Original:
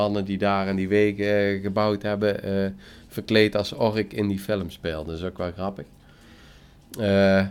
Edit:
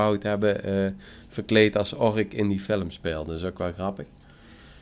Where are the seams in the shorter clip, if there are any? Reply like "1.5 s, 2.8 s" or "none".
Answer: none